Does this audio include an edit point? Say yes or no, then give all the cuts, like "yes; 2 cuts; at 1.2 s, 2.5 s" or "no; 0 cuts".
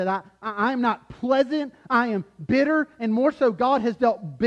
no; 0 cuts